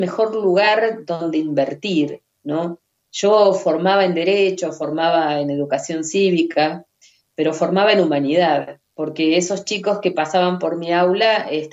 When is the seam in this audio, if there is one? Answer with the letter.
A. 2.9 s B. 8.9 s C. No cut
B